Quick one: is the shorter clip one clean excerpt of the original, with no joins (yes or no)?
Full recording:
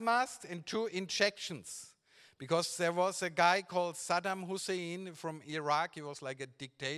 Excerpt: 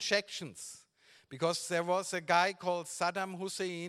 yes